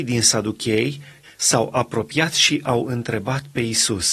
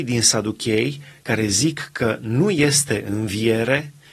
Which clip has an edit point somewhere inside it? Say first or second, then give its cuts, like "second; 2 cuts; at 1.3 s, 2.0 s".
first; 1 cut; at 1.2 s